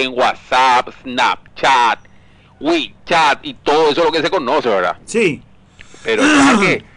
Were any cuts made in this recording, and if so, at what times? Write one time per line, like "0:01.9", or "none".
none